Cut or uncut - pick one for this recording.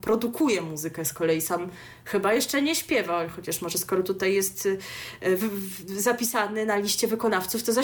uncut